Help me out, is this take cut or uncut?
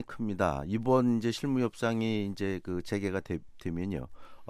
uncut